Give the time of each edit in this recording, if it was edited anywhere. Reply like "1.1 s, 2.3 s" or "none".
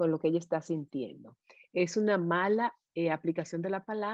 none